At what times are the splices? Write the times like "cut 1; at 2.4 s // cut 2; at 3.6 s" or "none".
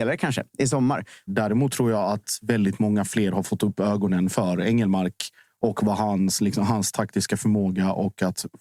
cut 1; at 1.3 s